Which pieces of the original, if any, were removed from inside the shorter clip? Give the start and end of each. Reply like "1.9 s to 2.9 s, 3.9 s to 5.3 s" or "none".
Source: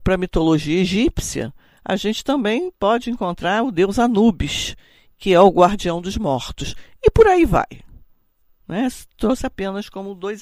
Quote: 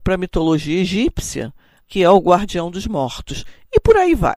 1.8 s to 5.1 s